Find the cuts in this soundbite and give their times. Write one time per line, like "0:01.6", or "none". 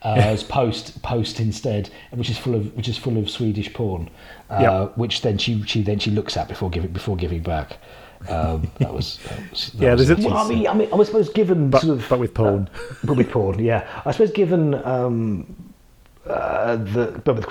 0:10.2

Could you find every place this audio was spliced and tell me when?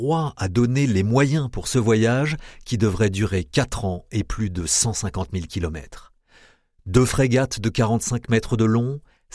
none

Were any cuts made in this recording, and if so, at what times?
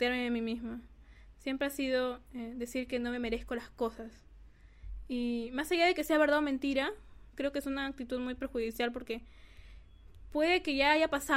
none

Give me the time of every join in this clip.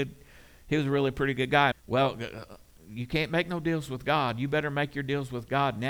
0:01.7

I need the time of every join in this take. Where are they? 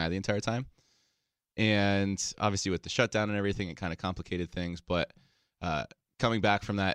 none

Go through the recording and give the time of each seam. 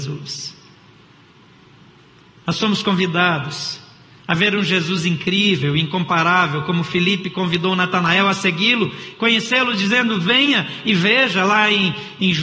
none

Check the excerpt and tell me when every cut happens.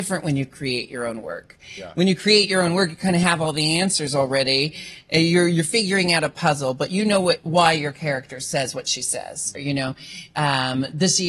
0:09.5

